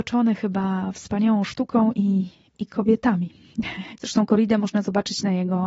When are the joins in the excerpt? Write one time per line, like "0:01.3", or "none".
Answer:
0:03.9